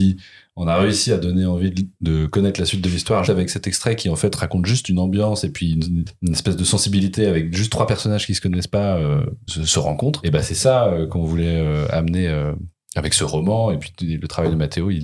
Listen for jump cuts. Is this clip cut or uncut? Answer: cut